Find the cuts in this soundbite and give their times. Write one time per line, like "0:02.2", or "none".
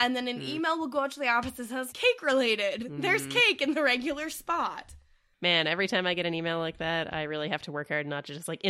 0:01.9